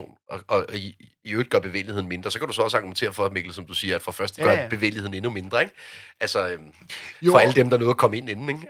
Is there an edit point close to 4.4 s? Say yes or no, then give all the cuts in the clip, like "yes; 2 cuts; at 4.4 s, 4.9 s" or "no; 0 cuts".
yes; 1 cut; at 4.4 s